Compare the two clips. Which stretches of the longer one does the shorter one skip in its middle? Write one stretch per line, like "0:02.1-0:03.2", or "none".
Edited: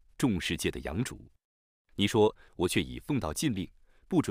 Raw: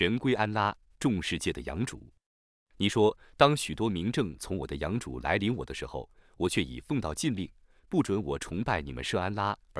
0:03.3-0:06.3